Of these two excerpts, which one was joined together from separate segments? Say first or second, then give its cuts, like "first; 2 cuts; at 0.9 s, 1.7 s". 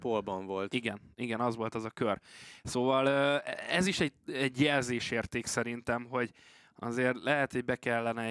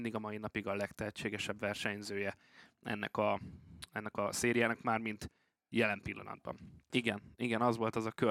second; 1 cut; at 6.9 s